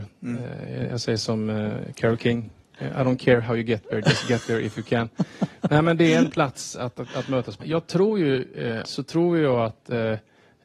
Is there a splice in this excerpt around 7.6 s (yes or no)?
yes